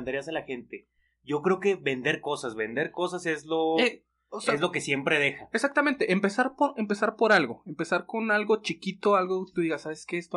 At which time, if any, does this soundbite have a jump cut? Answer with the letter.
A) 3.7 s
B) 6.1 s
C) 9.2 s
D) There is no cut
D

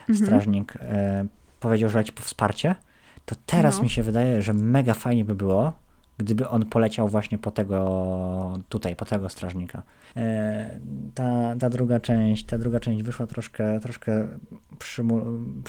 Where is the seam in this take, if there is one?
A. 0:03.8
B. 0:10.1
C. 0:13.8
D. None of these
B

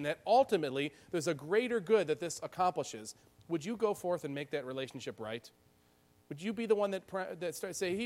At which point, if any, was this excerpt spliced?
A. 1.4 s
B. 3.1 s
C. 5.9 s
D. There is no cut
D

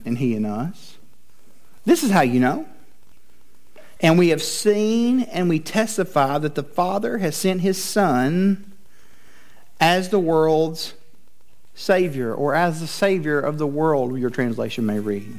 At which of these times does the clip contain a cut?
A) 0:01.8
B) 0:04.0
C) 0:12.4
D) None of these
B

